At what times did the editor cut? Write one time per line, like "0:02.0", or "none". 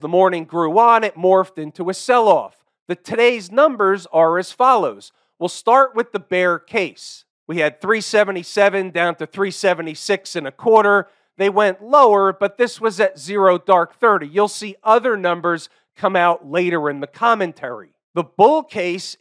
none